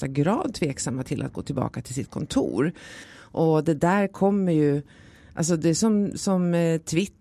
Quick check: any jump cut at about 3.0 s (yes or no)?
yes